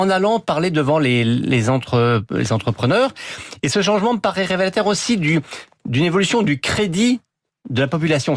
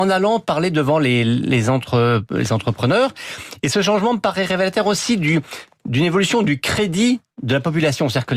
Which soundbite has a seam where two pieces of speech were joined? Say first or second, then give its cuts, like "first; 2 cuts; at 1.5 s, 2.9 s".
second; 1 cut; at 7.3 s